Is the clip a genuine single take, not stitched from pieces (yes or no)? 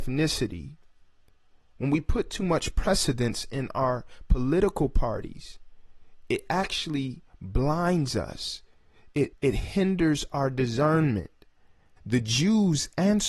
no